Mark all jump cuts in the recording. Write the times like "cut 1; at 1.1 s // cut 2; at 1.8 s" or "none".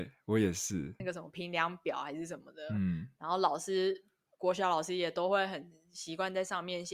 cut 1; at 1.0 s